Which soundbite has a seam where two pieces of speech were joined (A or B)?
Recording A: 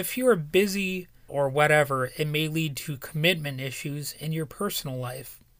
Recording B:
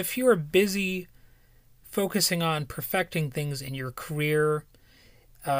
A